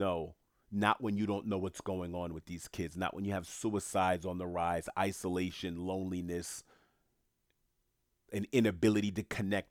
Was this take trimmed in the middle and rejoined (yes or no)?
no